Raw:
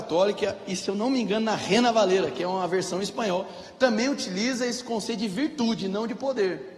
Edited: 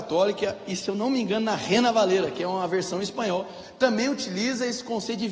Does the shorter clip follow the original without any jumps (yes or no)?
yes